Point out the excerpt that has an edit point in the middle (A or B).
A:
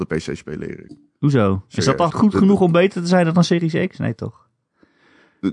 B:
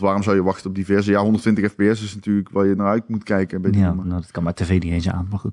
A